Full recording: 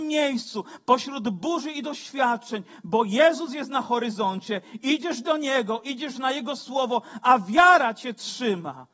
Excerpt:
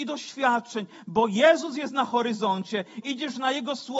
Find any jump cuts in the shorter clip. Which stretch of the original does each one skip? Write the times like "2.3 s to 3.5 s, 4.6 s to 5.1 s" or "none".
4.8 s to 5.8 s